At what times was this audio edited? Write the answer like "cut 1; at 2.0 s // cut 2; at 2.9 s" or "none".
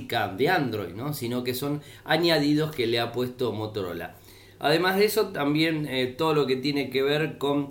none